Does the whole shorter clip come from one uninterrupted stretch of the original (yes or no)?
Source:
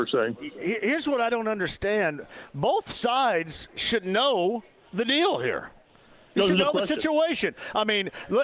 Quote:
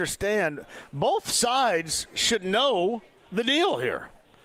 yes